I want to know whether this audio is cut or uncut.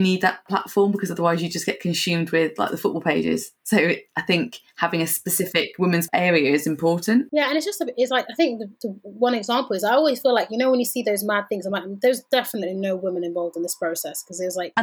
uncut